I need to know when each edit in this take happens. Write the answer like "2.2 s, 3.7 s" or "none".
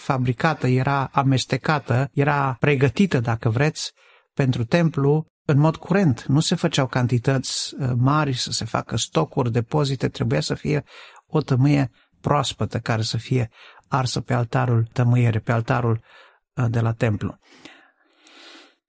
none